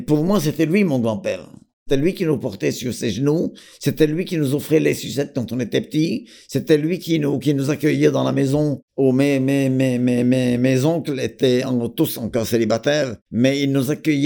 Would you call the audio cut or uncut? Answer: uncut